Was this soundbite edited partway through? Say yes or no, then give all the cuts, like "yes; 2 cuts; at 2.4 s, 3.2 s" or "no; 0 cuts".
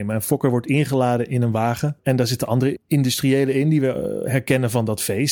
no; 0 cuts